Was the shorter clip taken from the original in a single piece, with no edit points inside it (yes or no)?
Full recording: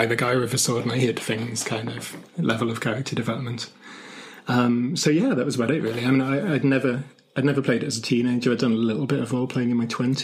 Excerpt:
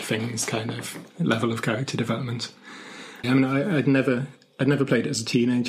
no